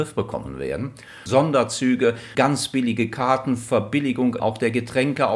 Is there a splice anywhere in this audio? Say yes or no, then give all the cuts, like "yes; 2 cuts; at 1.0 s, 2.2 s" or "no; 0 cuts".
yes; 3 cuts; at 1.3 s, 2.3 s, 4.4 s